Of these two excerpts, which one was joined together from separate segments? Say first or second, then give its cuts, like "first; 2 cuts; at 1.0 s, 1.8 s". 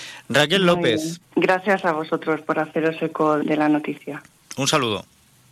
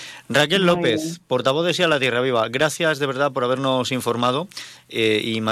first; 2 cuts; at 1.2 s, 3.4 s